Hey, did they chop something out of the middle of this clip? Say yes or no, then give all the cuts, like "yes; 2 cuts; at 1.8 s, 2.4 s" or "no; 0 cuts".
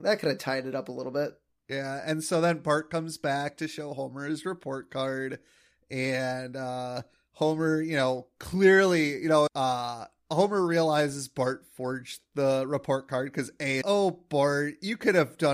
yes; 2 cuts; at 9.5 s, 13.8 s